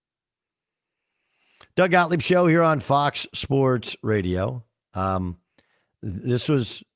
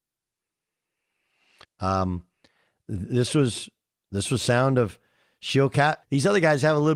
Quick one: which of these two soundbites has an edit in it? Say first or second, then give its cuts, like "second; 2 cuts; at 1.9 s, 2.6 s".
second; 2 cuts; at 1.6 s, 6.0 s